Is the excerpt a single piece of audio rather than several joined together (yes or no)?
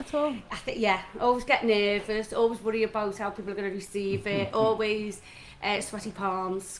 yes